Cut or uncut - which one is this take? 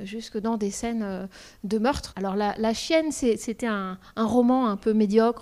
cut